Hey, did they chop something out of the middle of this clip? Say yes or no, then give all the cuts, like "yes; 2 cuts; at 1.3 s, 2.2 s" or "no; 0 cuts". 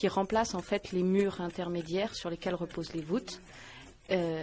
no; 0 cuts